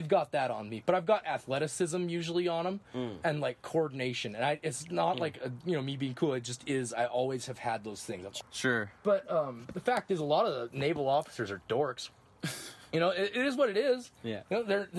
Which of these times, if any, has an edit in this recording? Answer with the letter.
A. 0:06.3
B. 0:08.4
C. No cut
B